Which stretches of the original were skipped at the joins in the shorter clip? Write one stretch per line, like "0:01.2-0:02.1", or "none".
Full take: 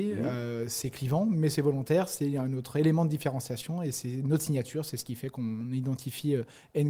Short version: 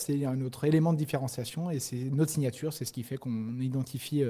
none